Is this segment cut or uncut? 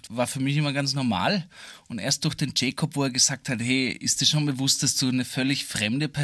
uncut